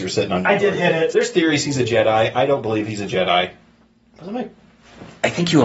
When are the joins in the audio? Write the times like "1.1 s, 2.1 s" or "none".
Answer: 1.1 s